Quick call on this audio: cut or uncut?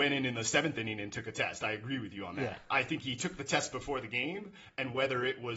uncut